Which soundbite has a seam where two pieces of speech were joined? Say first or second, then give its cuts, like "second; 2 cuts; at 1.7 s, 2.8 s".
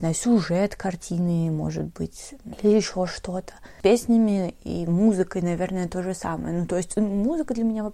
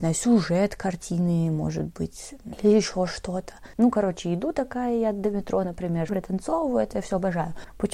second; 2 cuts; at 3.7 s, 6.1 s